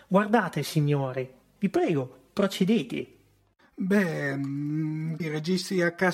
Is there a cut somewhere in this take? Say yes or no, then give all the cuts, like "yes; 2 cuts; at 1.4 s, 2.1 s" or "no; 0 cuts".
yes; 2 cuts; at 1.6 s, 5.2 s